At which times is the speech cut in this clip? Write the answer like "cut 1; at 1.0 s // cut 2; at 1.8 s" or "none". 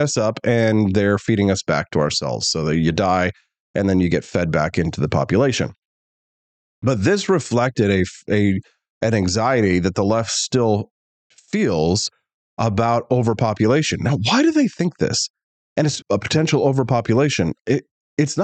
cut 1; at 16.0 s